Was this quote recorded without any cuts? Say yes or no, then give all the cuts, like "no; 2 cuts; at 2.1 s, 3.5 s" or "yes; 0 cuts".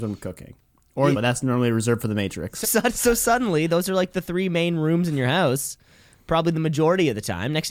no; 2 cuts; at 1.1 s, 2.6 s